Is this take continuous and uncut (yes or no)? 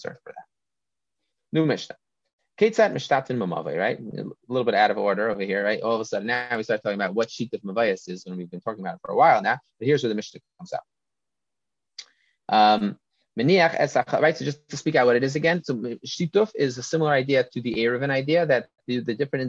yes